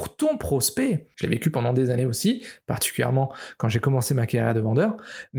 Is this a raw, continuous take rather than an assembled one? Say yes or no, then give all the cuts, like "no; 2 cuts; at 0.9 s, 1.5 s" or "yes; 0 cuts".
no; 1 cut; at 1.1 s